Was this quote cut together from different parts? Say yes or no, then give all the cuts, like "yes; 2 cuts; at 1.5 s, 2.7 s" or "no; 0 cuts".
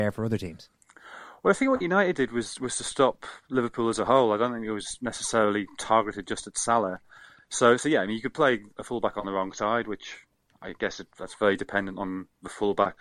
no; 0 cuts